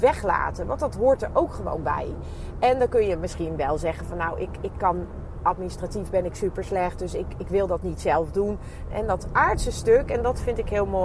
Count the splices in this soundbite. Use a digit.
1